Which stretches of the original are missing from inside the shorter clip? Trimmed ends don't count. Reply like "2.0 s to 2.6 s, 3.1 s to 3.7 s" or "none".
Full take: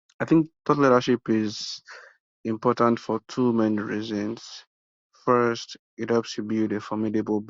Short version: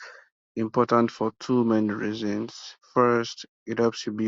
4.7 s to 5.1 s